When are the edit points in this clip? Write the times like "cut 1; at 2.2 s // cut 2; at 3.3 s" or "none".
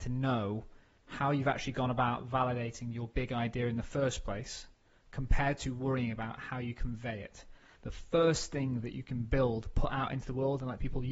cut 1; at 7.8 s